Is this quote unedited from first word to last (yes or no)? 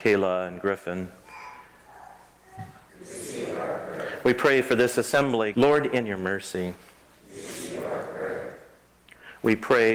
no